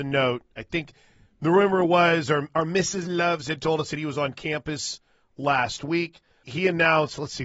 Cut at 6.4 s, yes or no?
yes